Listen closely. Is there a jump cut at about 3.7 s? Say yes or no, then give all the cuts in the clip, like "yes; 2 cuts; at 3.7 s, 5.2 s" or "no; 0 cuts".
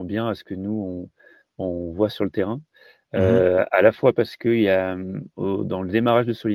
no; 0 cuts